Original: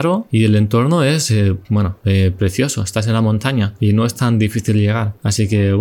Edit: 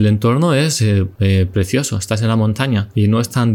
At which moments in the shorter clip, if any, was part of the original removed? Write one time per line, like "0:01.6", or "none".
0:01.2